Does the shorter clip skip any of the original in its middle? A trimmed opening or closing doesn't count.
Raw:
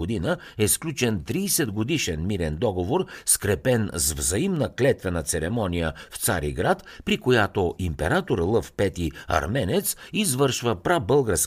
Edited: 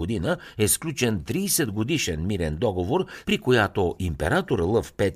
yes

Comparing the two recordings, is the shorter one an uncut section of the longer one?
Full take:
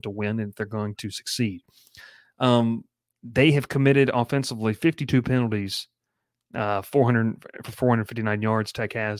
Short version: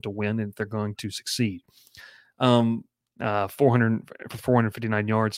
no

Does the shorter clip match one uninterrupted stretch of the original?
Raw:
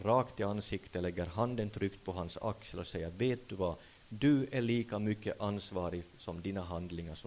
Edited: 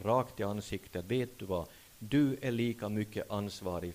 no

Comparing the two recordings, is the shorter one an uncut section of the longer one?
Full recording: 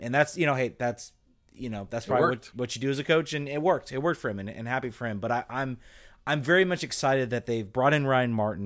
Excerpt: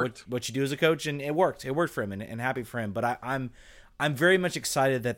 yes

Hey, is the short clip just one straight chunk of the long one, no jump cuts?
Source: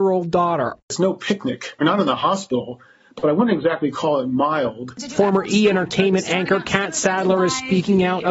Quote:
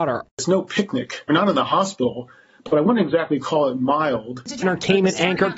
no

